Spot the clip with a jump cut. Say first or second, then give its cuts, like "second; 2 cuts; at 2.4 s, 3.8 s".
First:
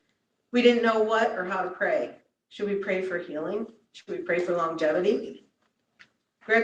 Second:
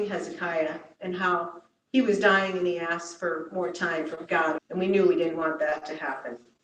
second; 1 cut; at 4.6 s